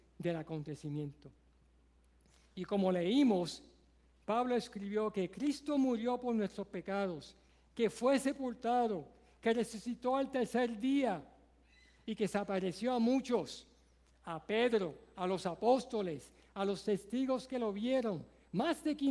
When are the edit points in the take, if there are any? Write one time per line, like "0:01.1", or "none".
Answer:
none